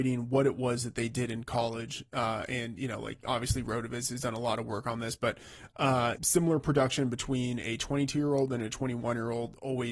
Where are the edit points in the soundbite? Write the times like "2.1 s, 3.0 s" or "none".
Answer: 6.2 s